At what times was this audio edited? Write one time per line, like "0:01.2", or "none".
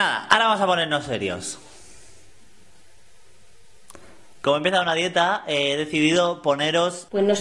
none